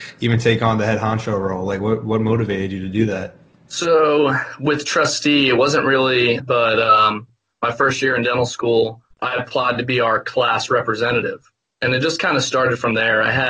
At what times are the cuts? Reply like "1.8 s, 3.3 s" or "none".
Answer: 6.4 s, 9.1 s